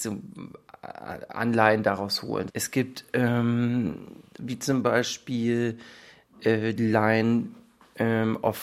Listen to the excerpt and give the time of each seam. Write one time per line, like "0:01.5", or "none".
0:02.5
0:04.4
0:06.8

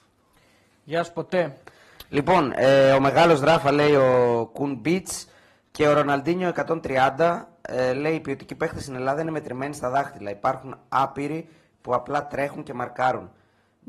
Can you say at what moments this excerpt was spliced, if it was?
none

